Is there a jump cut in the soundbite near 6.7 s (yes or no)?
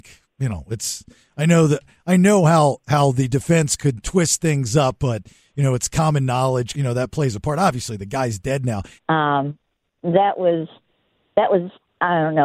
yes